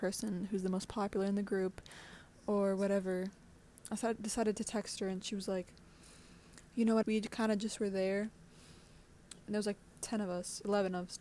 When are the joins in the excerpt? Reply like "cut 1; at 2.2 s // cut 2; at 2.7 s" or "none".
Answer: cut 1; at 7.0 s // cut 2; at 9.4 s